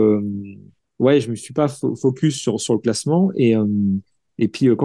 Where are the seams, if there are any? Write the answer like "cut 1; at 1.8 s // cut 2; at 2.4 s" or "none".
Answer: none